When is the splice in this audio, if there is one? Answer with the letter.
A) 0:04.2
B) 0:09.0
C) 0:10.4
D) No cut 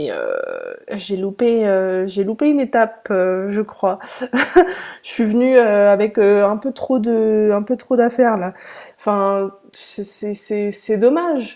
B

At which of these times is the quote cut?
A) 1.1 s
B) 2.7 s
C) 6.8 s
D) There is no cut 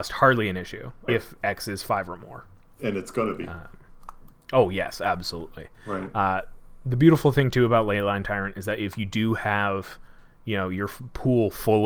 A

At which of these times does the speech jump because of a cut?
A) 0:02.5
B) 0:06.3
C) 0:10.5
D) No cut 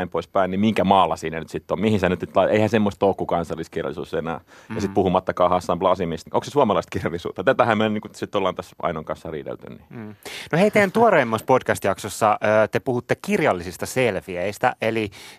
B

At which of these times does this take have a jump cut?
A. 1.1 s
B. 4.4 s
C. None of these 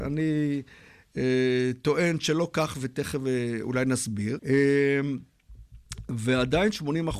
B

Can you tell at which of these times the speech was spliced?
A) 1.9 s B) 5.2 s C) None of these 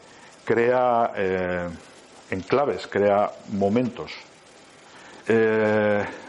B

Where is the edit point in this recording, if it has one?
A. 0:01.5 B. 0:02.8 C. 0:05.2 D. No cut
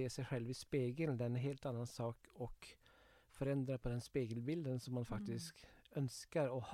D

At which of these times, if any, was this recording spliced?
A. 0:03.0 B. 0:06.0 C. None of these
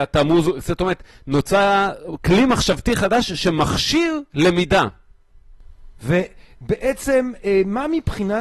B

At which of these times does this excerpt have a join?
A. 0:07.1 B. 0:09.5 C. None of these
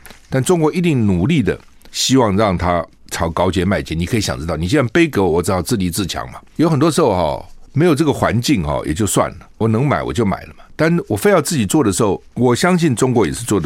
C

